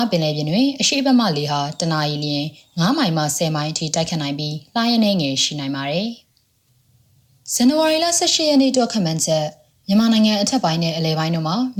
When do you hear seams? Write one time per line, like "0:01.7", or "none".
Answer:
none